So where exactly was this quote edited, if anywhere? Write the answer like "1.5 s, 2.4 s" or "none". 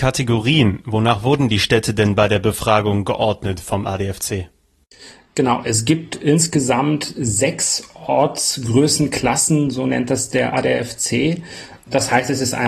none